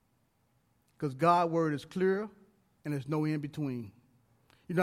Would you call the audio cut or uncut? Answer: cut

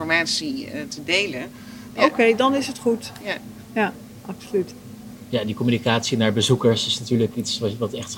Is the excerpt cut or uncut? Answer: cut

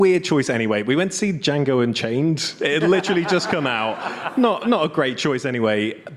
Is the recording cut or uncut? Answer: uncut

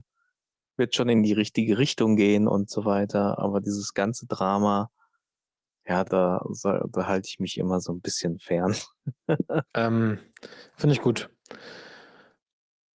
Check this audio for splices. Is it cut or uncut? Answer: cut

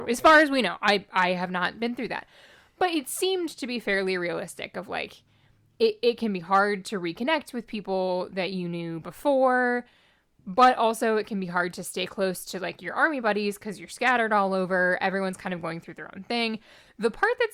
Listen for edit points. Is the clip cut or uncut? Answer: uncut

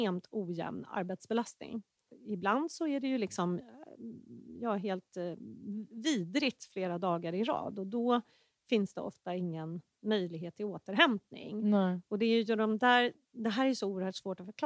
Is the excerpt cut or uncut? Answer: uncut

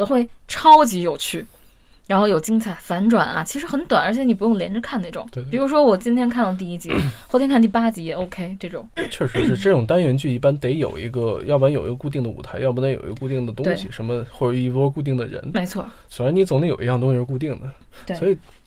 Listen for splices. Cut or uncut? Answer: uncut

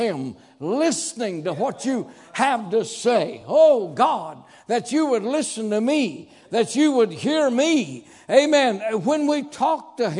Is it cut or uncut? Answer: uncut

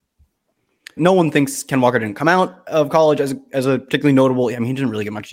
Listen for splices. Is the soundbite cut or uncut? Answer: cut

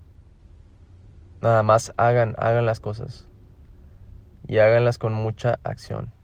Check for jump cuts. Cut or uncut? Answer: uncut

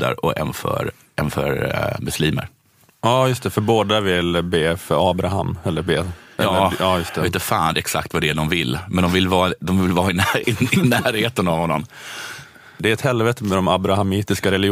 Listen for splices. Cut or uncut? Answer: cut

